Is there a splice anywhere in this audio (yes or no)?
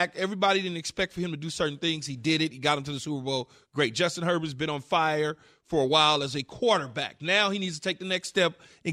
no